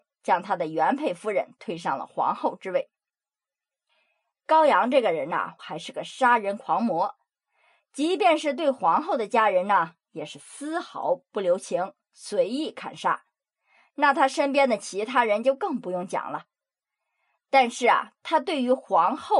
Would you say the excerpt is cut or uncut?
cut